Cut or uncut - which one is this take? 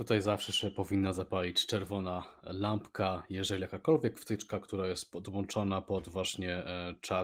uncut